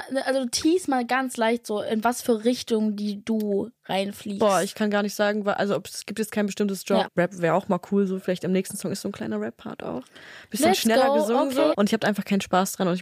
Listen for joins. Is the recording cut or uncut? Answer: cut